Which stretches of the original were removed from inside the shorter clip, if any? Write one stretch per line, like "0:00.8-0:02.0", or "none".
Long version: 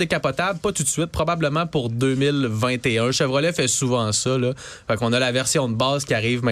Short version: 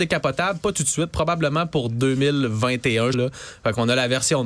0:03.1-0:04.4